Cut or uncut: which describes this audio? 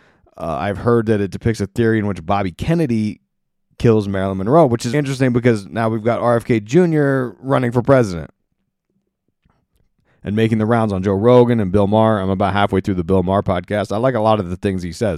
cut